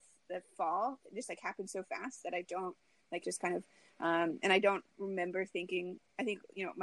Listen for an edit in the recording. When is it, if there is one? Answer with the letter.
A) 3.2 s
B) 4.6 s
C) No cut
A